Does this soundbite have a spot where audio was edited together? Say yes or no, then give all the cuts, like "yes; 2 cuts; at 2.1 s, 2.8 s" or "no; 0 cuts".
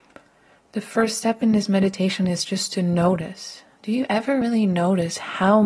no; 0 cuts